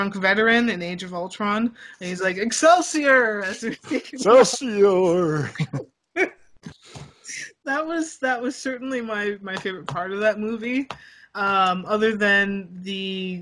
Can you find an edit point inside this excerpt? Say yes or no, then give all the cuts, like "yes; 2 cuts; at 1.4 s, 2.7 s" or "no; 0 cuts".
no; 0 cuts